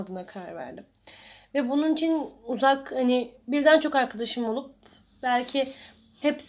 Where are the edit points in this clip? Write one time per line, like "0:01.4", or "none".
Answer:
none